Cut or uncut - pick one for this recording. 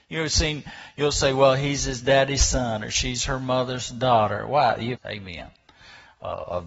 cut